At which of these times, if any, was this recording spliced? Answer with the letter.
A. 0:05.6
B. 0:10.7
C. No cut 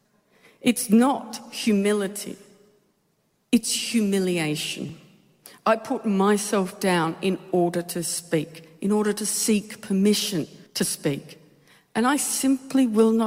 B